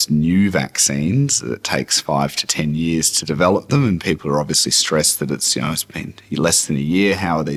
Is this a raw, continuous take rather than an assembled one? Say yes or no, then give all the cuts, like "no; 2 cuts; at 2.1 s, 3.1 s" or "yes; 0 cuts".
yes; 0 cuts